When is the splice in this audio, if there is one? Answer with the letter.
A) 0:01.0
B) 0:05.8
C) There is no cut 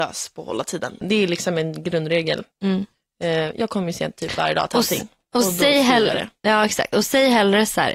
A